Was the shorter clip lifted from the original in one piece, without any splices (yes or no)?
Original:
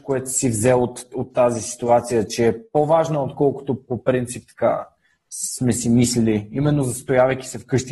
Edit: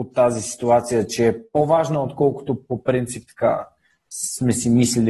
yes